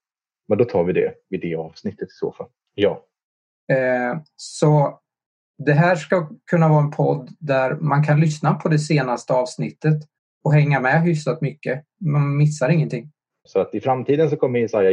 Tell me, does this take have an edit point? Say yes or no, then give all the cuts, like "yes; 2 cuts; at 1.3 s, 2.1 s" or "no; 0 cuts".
yes; 2 cuts; at 2.7 s, 13.5 s